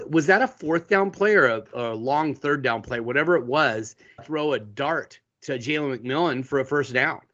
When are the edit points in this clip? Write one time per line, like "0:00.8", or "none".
0:04.2